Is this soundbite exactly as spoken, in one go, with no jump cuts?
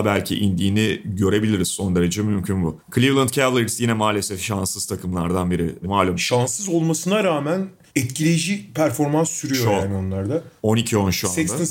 yes; 0 cuts

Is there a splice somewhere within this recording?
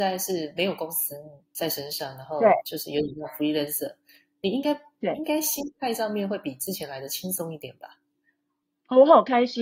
no; 0 cuts

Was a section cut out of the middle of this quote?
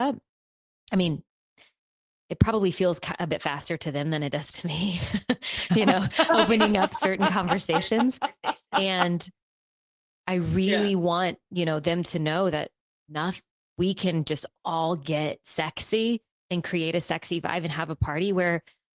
no; 0 cuts

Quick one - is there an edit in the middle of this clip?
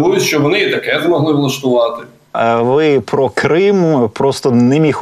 yes; 1 cut; at 2.3 s

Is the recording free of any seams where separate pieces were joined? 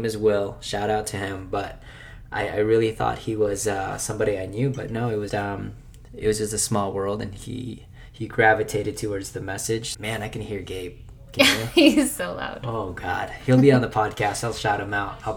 no; 2 cuts; at 5.3 s, 9.9 s

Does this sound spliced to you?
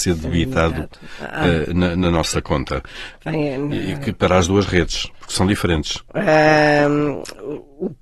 yes; 2 cuts; at 3.2 s, 6.1 s

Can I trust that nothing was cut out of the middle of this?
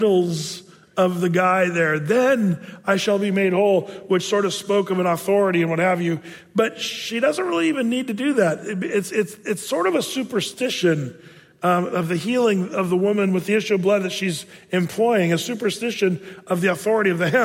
yes; 0 cuts

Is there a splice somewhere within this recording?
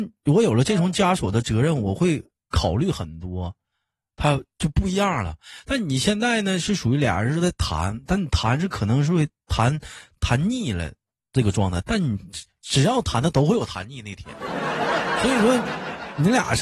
yes; 1 cut; at 11.8 s

